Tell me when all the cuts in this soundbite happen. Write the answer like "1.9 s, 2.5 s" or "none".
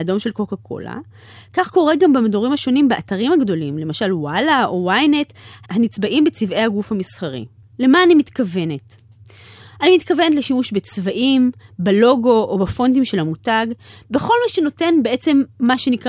7.6 s

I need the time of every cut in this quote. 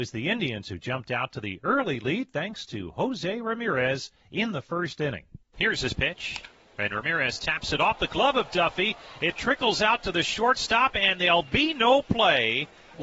none

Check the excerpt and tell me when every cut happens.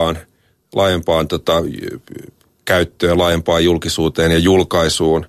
none

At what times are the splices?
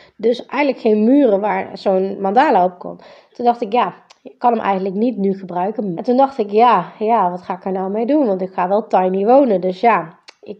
5.9 s

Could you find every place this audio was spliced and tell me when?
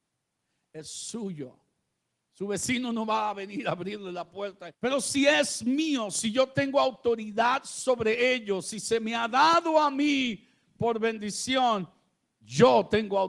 4.7 s

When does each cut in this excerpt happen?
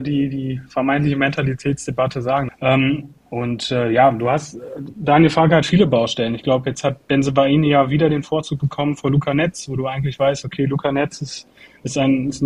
2.5 s

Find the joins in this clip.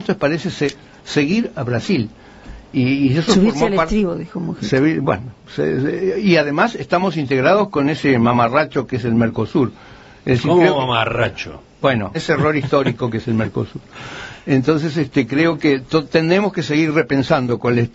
12.1 s

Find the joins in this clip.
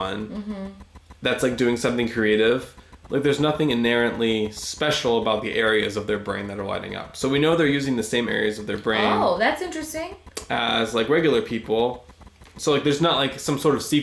none

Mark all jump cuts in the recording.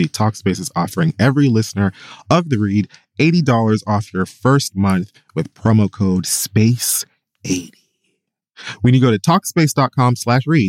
none

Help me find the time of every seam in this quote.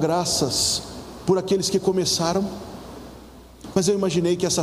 3.7 s

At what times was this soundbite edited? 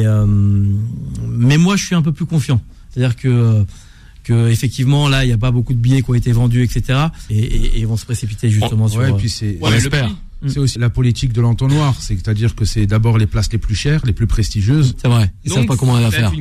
7.3 s, 10.8 s, 14.9 s

